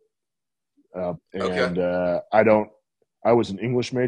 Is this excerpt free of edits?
no; 1 cut; at 1.2 s

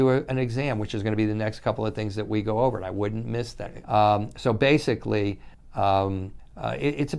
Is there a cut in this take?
yes; 1 cut; at 3.8 s

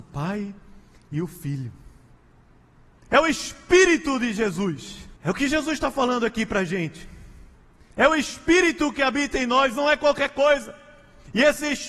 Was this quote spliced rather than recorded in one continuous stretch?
yes; 3 cuts; at 3.0 s, 5.2 s, 7.9 s

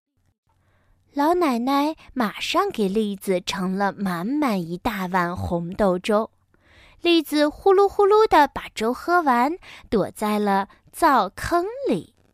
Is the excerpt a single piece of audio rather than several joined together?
yes; 0 cuts

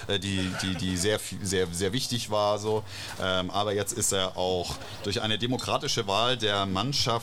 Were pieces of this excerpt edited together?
no; 0 cuts

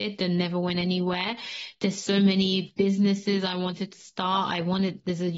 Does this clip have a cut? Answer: no; 0 cuts

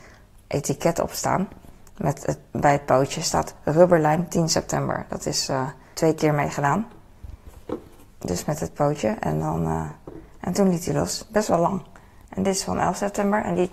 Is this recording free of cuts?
no; 1 cut; at 5.9 s

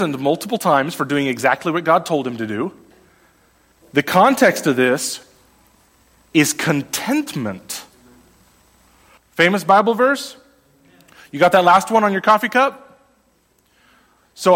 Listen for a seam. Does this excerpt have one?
yes; 2 cuts; at 3.8 s, 9.2 s

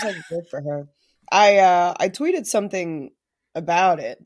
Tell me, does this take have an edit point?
no; 0 cuts

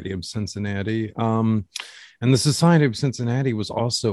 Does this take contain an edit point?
no; 0 cuts

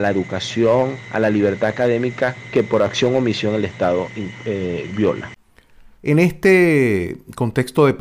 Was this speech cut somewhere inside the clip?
yes; 1 cut; at 5.9 s

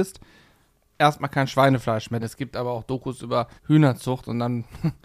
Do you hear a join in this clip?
yes; 2 cuts; at 2.2 s, 3.6 s

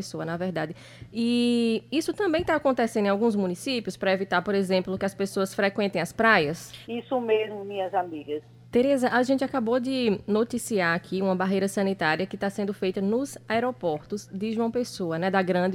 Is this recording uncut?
no; 2 cuts; at 6.8 s, 8.6 s

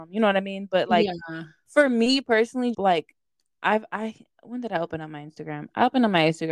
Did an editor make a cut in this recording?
yes; 1 cut; at 2.7 s

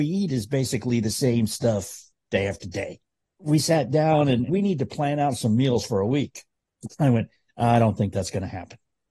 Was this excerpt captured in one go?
no; 1 cut; at 4.5 s

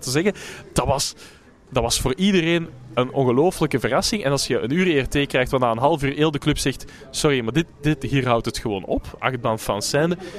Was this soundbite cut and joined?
no; 0 cuts

